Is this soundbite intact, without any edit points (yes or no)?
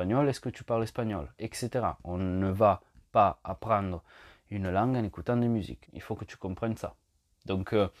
no